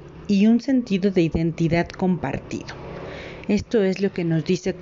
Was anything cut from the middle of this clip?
no; 0 cuts

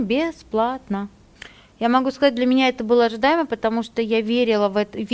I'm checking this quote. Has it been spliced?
no; 0 cuts

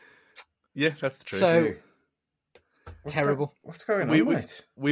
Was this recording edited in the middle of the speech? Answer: no; 0 cuts

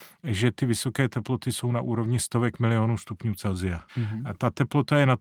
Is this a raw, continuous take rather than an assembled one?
no; 1 cut; at 3.9 s

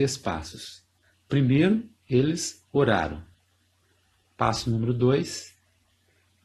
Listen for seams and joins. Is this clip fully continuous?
yes; 0 cuts

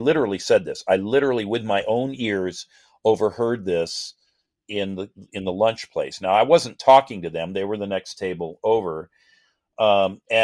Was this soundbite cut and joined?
no; 0 cuts

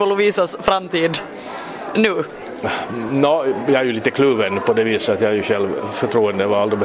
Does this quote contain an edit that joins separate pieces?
no; 0 cuts

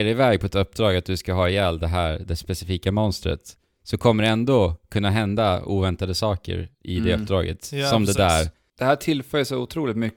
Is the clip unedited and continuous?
yes; 0 cuts

